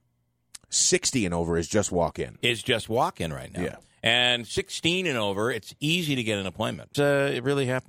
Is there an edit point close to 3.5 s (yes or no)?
no